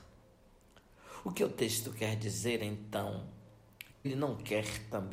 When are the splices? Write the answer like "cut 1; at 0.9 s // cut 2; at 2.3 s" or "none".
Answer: cut 1; at 3.9 s